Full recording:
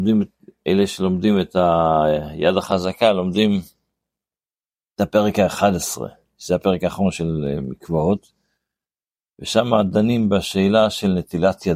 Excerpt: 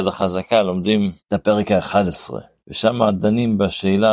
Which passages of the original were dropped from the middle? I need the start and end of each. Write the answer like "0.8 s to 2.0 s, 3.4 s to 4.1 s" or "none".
3.7 s to 4.9 s, 6.3 s to 9.3 s